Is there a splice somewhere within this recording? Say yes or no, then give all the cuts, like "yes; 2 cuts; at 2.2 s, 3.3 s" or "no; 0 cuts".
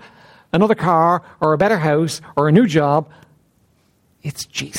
no; 0 cuts